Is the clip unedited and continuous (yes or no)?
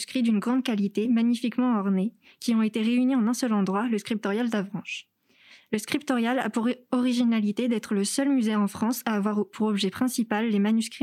yes